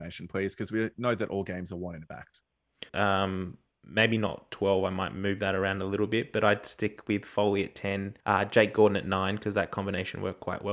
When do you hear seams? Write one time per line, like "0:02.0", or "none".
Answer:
0:02.9
0:08.2